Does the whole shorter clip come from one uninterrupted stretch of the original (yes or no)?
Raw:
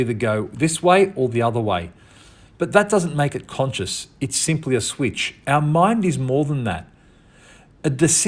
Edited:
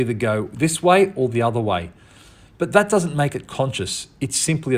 yes